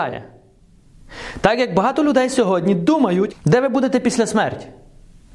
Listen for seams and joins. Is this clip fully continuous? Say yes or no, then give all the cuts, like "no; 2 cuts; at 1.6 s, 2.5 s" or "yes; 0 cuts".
no; 1 cut; at 3.3 s